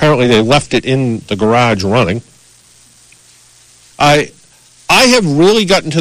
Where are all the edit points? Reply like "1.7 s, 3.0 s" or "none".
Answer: 3.9 s